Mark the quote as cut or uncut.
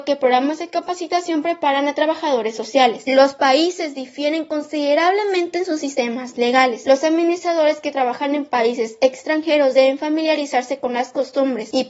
cut